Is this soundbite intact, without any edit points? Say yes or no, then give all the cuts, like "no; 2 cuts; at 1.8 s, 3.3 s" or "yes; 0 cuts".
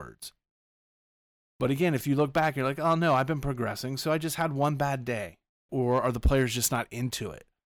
no; 1 cut; at 5.7 s